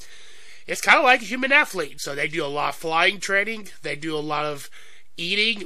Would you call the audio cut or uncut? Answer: cut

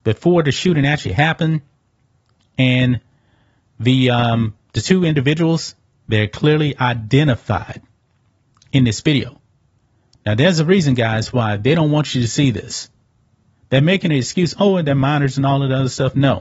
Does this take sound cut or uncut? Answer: uncut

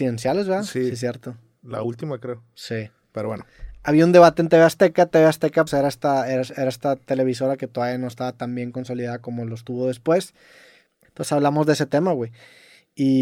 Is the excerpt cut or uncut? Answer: cut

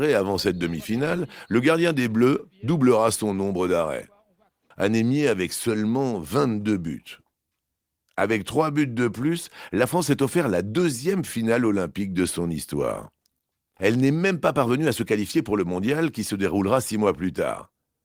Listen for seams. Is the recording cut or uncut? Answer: cut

